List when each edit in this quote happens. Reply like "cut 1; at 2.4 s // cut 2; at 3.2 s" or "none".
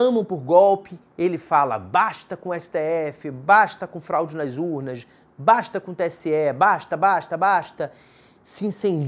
none